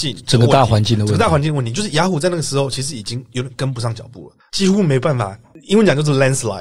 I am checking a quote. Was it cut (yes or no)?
yes